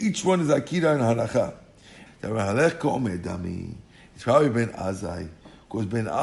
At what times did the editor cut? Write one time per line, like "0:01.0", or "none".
0:02.1